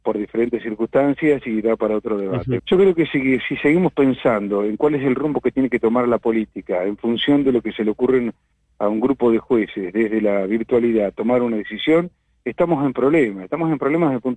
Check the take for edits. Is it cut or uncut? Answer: cut